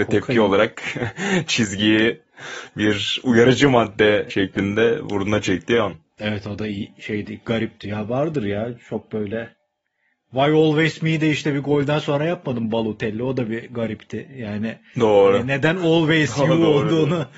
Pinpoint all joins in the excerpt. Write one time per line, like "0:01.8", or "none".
none

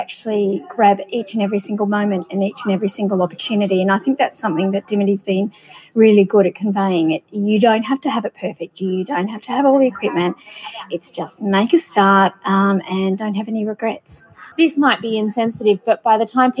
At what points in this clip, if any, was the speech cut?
0:14.5

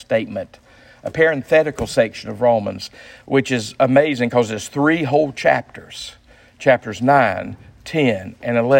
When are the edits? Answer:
none

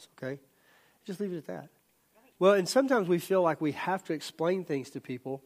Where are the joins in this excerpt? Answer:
0:02.3

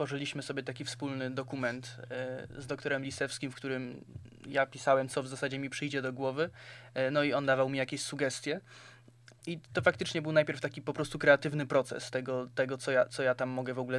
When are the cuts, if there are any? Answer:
none

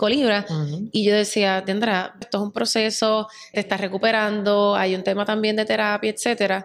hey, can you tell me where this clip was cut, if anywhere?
0:02.2
0:03.5

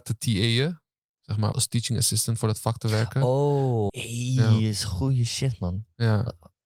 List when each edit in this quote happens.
0:01.5
0:03.9

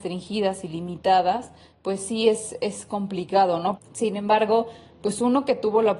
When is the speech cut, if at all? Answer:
0:03.8

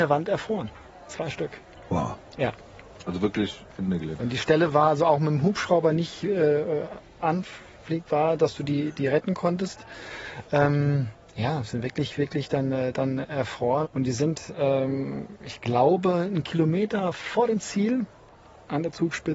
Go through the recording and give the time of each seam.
0:04.2
0:13.8

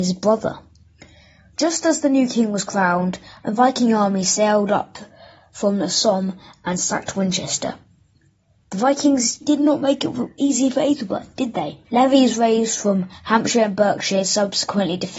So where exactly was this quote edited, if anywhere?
0:09.4
0:11.8

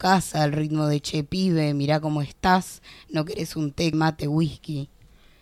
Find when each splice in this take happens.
0:03.9

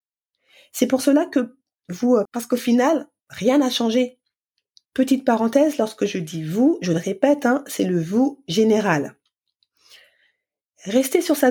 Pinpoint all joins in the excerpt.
0:02.3
0:04.9

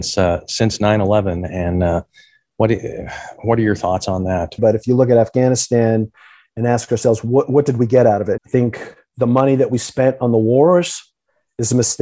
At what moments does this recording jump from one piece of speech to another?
0:04.6
0:08.4

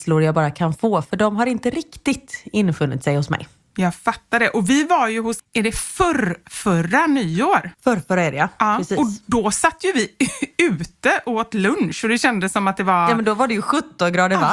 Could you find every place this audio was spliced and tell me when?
0:05.4
0:07.7

